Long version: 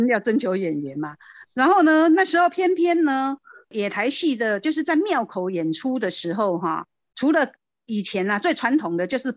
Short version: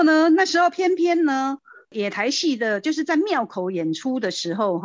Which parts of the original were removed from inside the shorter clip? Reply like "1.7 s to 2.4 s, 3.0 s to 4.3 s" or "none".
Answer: none